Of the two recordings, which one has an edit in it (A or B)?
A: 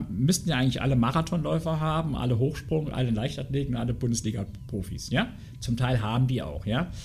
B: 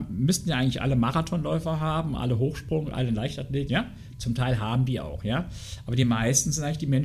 B